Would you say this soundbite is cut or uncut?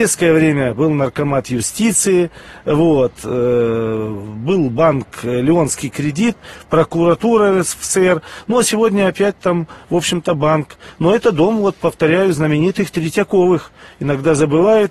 uncut